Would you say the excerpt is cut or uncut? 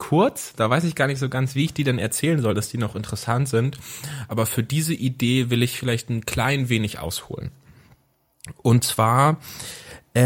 uncut